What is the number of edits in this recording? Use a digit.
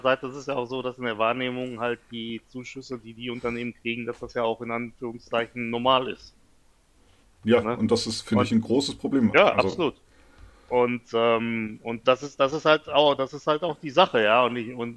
0